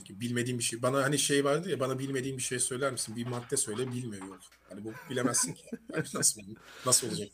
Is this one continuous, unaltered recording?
yes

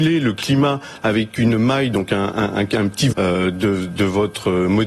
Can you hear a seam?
yes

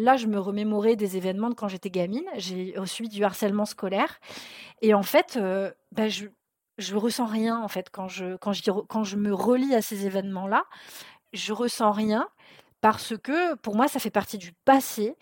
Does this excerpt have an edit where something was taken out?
no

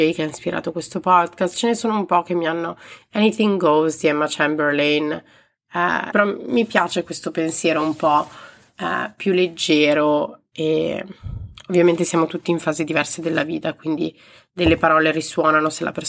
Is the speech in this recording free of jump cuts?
no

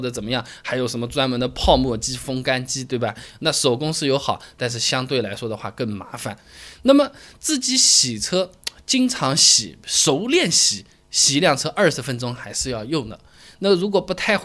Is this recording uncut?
yes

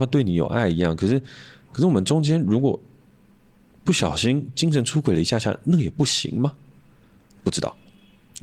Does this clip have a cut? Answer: no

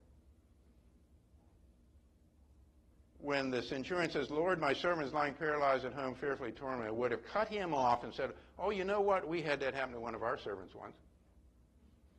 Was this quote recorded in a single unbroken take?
yes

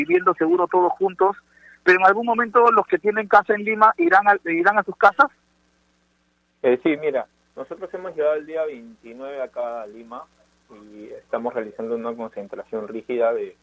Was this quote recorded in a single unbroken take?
yes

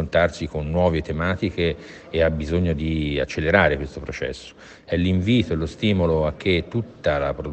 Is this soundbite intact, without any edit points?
yes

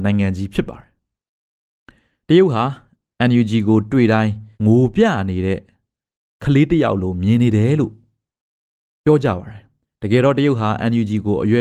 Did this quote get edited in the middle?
yes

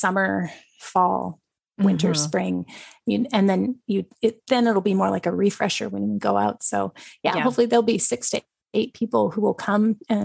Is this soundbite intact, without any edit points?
yes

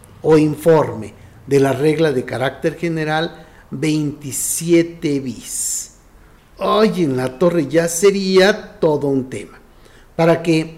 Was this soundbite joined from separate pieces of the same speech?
no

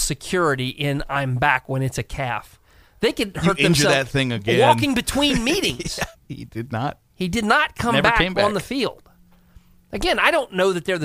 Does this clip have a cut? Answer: yes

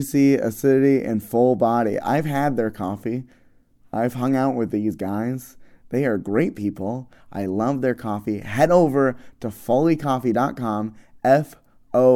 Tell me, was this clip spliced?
no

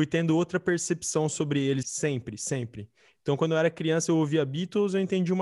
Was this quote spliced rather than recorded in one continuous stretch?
yes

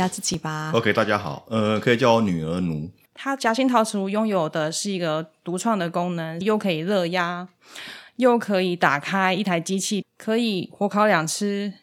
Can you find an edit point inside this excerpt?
yes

